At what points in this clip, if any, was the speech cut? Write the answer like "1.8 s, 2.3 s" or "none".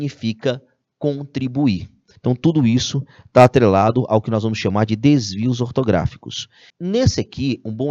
2.2 s, 6.7 s